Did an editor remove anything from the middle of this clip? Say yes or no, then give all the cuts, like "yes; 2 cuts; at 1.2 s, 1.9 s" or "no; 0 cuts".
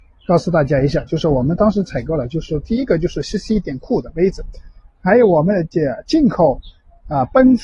no; 0 cuts